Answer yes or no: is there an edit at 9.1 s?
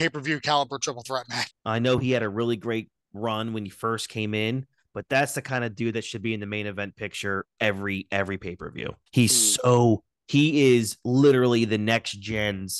yes